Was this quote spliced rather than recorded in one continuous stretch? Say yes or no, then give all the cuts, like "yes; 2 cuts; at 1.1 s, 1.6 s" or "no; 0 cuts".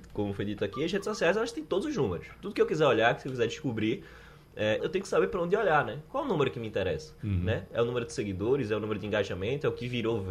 yes; 1 cut; at 4.8 s